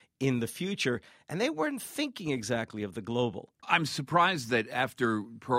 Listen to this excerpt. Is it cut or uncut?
cut